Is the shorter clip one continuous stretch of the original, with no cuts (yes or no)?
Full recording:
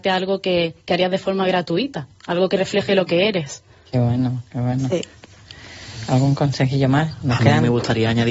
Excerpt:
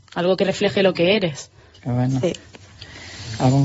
no